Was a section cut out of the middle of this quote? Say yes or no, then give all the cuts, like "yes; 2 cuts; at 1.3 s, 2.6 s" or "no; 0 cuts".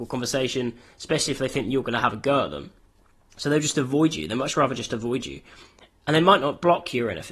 no; 0 cuts